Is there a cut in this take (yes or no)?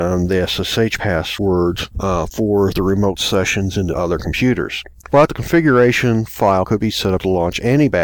no